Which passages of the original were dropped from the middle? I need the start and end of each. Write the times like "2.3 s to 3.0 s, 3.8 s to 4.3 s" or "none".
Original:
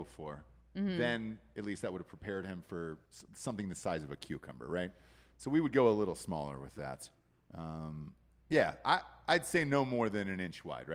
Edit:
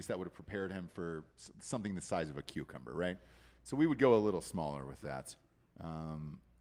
none